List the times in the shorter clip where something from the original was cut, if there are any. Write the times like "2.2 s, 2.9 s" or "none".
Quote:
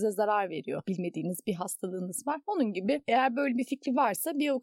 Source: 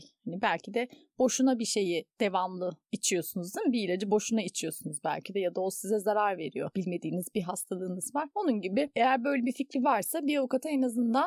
none